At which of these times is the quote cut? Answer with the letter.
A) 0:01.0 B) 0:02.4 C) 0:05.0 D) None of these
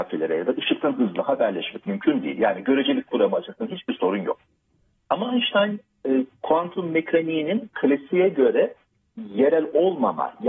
D